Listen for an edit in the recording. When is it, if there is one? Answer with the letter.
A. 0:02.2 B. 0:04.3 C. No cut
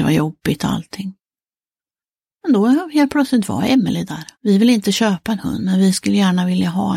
B